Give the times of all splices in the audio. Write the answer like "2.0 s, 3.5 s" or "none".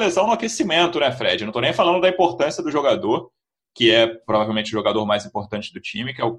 none